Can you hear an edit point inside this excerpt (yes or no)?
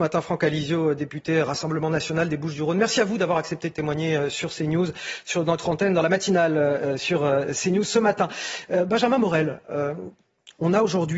no